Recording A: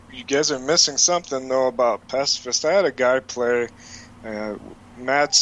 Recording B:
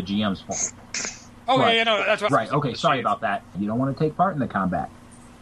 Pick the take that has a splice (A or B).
B